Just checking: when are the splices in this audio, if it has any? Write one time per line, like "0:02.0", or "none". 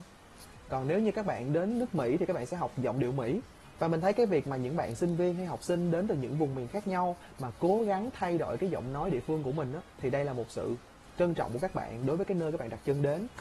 0:09.9